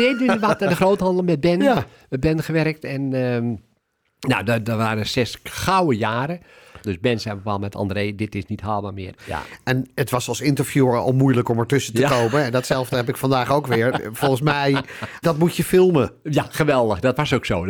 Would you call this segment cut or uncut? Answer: cut